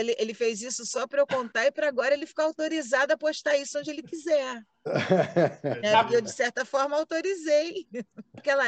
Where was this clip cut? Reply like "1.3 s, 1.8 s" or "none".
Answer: none